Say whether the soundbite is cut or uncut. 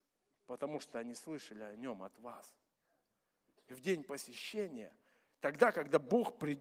uncut